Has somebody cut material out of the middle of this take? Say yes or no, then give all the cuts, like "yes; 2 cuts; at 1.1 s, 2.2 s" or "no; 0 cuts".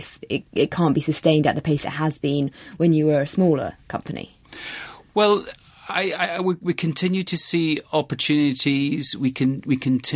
no; 0 cuts